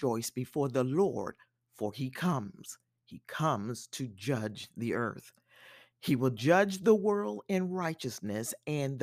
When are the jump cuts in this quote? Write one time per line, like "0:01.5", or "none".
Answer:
none